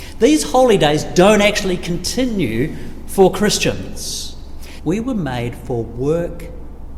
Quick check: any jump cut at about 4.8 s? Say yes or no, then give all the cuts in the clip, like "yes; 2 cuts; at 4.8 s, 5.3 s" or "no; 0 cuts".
yes; 1 cut; at 4.8 s